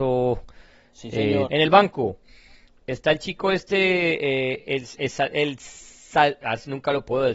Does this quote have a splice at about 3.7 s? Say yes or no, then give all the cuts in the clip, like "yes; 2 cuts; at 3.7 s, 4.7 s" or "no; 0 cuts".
no; 1 cut; at 1.5 s